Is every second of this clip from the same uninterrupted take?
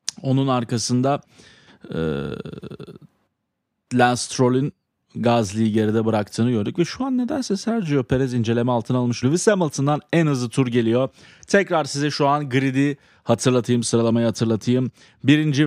yes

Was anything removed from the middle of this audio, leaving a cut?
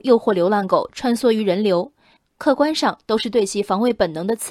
yes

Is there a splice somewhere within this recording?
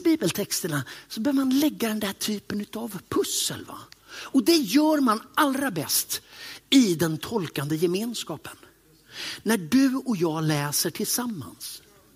no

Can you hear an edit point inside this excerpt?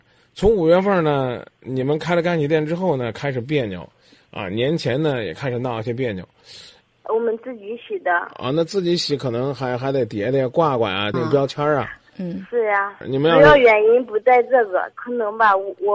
yes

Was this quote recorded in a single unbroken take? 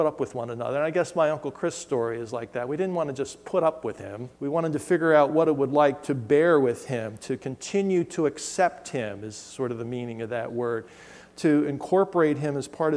no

